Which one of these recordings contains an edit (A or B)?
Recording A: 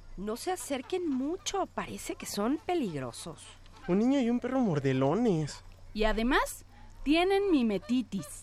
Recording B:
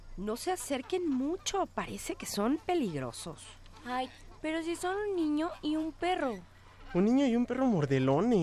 A